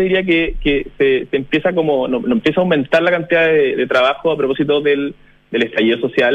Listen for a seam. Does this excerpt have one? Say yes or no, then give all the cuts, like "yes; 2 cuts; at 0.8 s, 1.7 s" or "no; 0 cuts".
no; 0 cuts